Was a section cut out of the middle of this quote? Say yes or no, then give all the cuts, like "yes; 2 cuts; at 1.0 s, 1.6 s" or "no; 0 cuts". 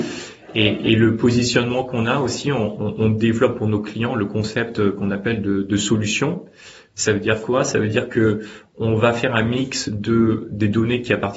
no; 0 cuts